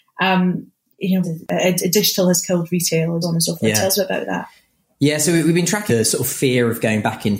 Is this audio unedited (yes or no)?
no